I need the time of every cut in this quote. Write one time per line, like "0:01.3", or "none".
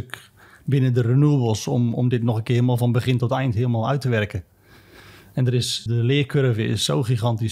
0:05.9